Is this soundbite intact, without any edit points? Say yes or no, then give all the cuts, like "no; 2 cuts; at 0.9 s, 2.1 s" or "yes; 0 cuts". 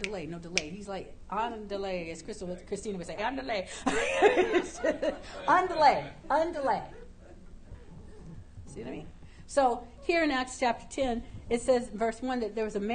no; 3 cuts; at 3.2 s, 6.2 s, 8.6 s